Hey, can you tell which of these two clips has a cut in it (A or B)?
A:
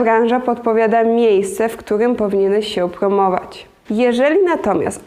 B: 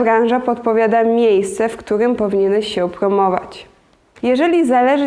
A